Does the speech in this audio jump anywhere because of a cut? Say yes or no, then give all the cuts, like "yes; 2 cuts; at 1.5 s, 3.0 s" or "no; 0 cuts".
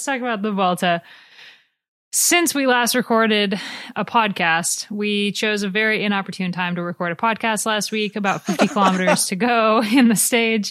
no; 0 cuts